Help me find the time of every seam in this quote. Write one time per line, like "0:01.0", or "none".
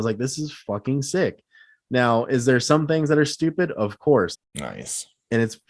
0:04.3